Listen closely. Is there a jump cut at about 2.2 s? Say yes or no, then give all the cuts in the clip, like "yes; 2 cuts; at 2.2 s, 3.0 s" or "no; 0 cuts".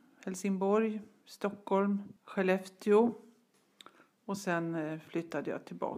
yes; 1 cut; at 2.2 s